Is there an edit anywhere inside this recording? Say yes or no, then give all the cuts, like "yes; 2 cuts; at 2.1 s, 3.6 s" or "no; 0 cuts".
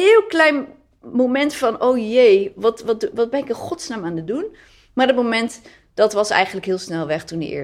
no; 0 cuts